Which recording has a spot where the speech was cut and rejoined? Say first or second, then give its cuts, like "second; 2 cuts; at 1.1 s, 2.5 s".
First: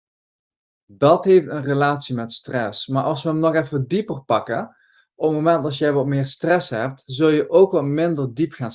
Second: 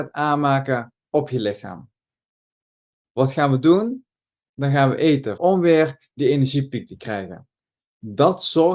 second; 2 cuts; at 3.1 s, 5.4 s